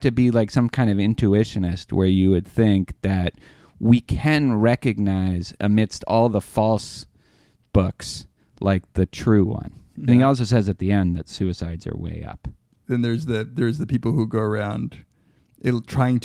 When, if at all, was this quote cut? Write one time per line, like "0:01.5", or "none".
0:10.1